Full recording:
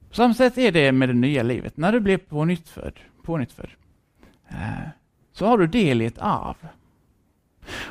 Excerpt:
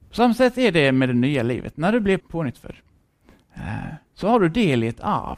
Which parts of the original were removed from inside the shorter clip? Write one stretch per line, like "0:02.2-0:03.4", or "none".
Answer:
0:02.2-0:03.1
0:05.0-0:05.2